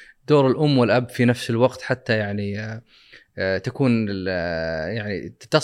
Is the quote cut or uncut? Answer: uncut